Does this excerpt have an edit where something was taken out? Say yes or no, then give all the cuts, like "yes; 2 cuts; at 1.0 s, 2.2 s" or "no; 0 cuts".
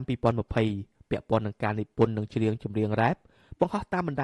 no; 0 cuts